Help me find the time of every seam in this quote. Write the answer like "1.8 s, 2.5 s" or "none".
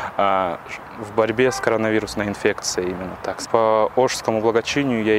3.5 s